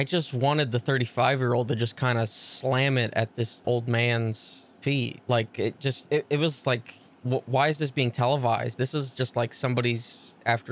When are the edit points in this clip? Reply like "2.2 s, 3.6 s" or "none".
3.6 s, 6.1 s